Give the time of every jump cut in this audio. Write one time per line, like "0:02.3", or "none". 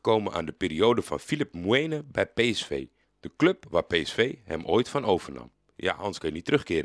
0:03.0